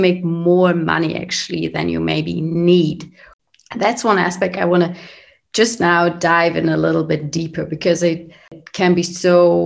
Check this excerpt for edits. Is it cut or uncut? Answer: uncut